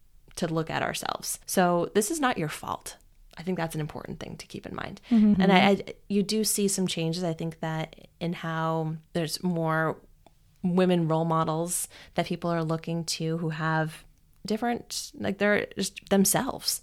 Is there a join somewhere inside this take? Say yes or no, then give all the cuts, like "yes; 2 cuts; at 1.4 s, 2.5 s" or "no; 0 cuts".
yes; 3 cuts; at 1.4 s, 5.3 s, 9.1 s